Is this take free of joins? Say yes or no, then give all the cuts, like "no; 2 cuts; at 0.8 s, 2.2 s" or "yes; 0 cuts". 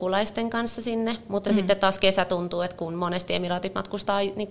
yes; 0 cuts